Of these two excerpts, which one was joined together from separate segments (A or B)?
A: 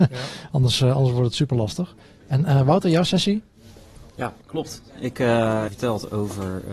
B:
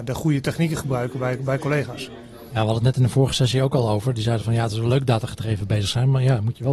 A